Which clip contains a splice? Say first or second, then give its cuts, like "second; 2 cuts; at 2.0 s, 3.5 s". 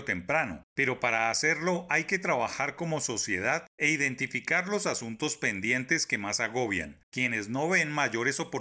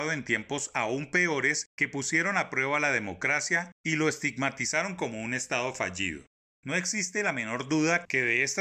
first; 1 cut; at 7.0 s